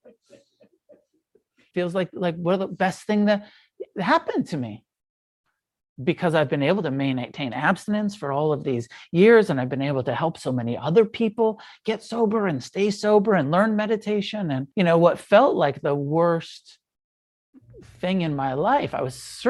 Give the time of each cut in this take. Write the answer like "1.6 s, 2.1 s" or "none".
1.7 s, 14.7 s